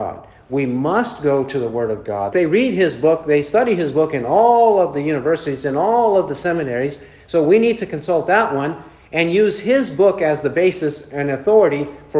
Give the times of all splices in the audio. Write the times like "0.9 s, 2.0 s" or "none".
2.3 s